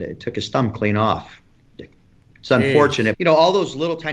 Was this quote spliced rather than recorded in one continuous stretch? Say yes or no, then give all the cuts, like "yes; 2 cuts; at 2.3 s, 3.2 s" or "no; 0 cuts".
yes; 1 cut; at 3.1 s